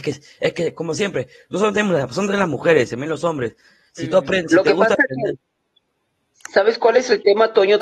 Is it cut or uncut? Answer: uncut